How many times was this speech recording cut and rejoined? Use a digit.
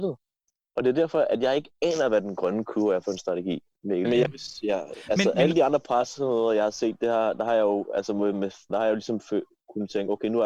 2